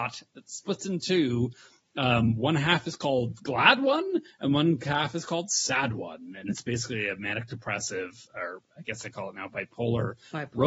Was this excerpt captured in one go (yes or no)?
yes